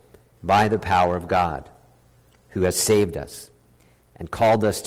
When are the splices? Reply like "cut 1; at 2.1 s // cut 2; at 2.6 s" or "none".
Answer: none